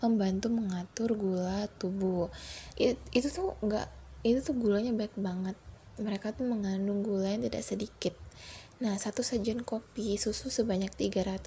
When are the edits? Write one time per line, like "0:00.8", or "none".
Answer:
0:02.7

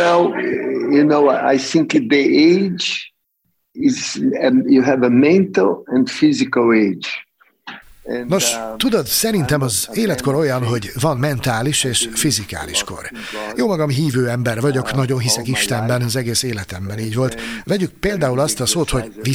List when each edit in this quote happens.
0:17.6

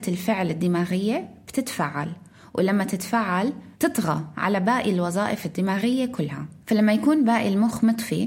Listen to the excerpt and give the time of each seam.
0:03.7
0:06.6

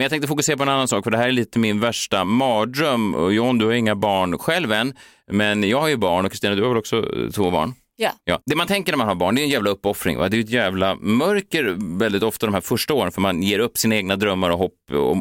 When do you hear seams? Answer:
none

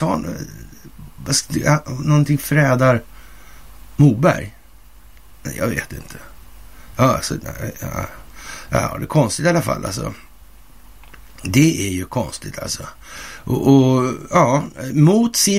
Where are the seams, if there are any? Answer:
none

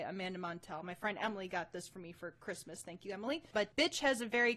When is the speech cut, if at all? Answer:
0:03.5

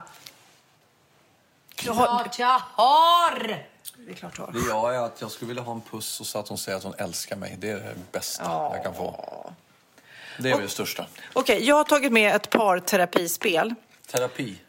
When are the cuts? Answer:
none

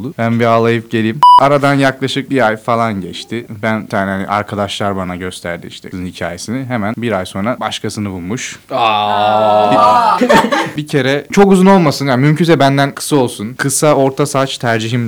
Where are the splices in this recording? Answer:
0:10.2

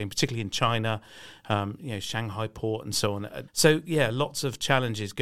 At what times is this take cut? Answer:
0:03.5

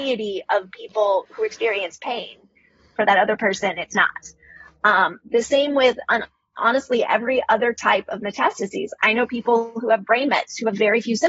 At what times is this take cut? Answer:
0:02.9

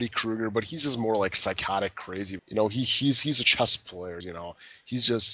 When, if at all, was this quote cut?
0:02.4
0:04.2

